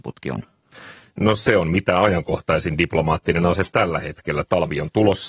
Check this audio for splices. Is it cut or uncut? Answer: uncut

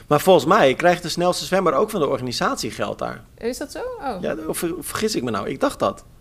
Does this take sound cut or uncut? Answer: uncut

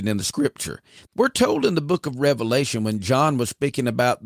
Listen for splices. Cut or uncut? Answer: cut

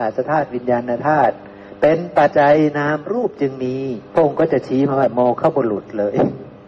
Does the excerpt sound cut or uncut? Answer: cut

